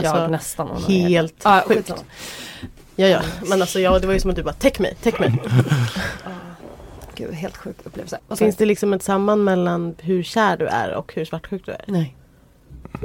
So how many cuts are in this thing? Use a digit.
1